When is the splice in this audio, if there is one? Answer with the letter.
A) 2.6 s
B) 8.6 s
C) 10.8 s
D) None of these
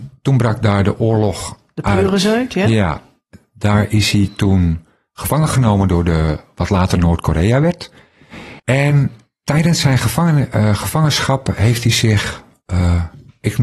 B